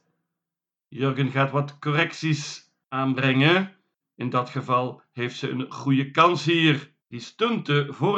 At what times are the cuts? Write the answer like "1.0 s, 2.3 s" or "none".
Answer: 4.0 s, 7.0 s